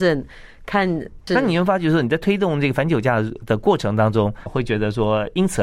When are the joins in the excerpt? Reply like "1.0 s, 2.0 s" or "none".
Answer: 1.3 s, 4.5 s